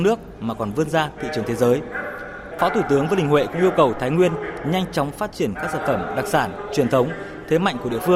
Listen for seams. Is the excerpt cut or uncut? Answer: cut